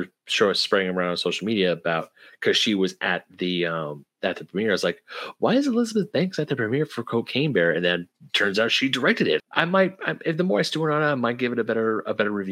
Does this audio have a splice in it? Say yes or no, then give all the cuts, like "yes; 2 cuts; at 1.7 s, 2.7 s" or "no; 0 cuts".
yes; 1 cut; at 9.4 s